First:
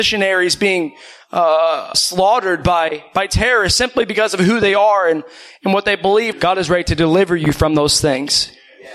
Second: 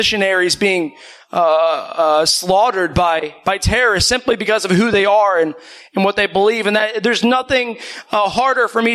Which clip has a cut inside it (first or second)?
first